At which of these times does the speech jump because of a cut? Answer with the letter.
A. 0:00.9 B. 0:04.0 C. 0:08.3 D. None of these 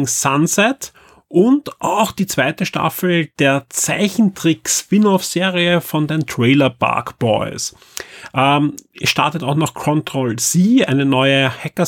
D